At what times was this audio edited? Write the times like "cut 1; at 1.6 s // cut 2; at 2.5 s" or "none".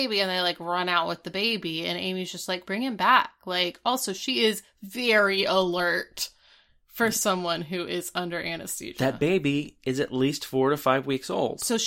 cut 1; at 2.6 s